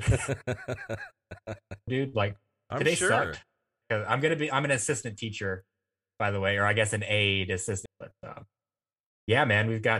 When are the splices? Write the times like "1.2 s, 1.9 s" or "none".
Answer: 1.9 s, 3.8 s, 7.9 s